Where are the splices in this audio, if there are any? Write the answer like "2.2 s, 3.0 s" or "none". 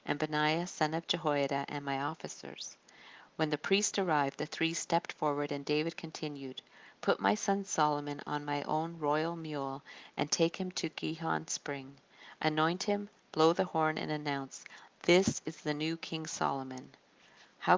none

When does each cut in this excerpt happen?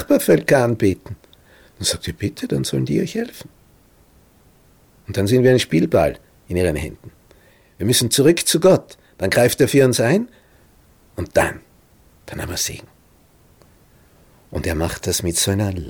none

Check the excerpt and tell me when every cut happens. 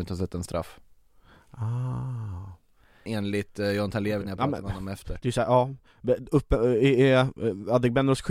3.1 s

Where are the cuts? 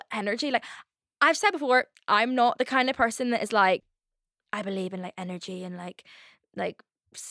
none

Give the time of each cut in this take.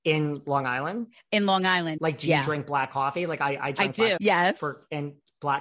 2.0 s, 4.2 s

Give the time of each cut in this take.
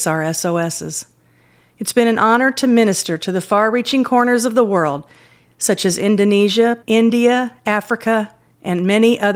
6.8 s

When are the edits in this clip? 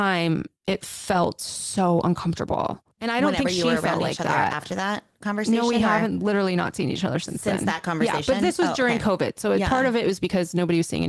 2.9 s

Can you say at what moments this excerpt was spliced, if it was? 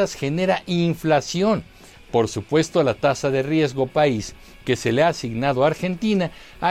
1.9 s

